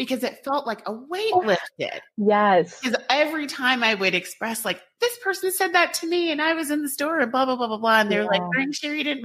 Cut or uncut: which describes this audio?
uncut